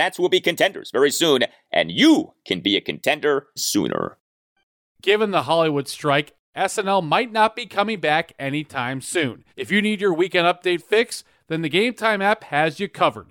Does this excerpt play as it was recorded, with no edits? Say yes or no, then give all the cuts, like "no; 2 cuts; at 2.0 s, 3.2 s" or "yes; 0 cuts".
no; 2 cuts; at 3.6 s, 9.5 s